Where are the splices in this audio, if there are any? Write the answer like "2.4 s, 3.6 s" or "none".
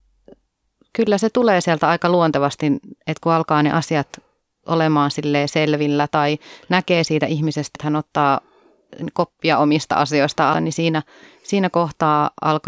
7.8 s, 10.5 s